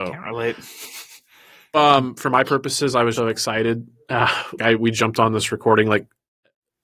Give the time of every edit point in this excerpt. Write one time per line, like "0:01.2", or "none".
0:01.7
0:03.1
0:04.6